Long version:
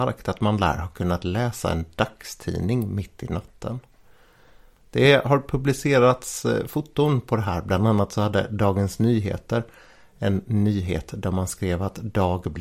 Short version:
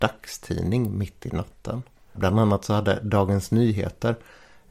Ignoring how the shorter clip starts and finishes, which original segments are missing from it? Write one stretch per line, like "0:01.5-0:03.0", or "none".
0:04.1-0:07.6